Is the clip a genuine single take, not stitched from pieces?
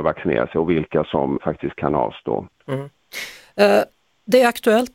no; 2 cuts; at 1.4 s, 2.6 s

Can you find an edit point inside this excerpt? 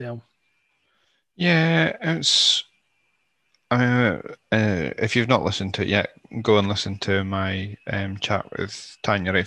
no; 0 cuts

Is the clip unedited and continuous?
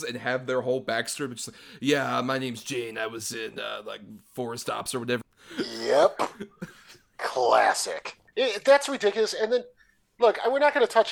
no; 1 cut; at 5.2 s

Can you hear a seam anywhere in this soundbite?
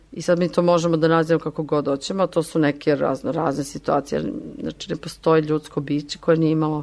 no; 0 cuts

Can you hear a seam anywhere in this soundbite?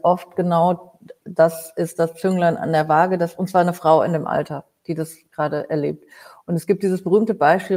no; 0 cuts

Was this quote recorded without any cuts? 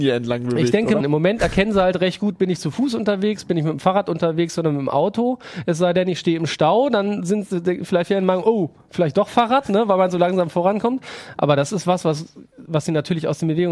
no; 1 cut; at 1.0 s

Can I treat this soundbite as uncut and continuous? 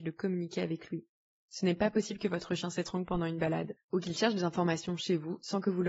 no; 1 cut; at 3.8 s

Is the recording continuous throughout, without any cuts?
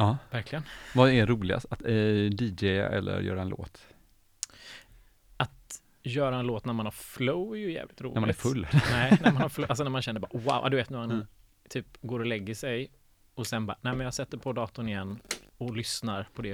yes; 0 cuts

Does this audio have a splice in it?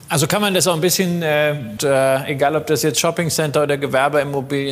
yes; 1 cut; at 1.8 s

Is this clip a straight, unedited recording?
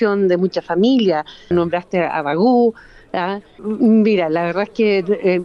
no; 2 cuts; at 1.5 s, 3.6 s

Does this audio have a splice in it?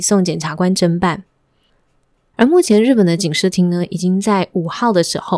yes; 1 cut; at 2.3 s

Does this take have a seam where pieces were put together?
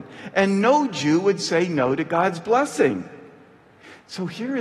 no; 0 cuts

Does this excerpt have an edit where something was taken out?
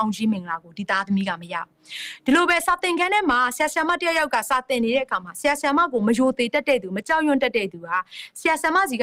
no; 0 cuts

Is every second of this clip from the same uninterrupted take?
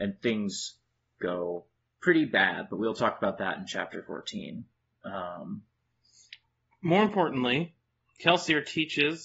yes; 0 cuts

